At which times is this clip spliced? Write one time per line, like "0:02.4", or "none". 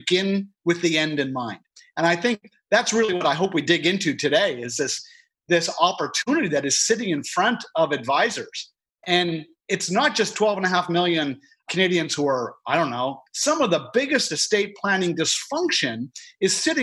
0:13.3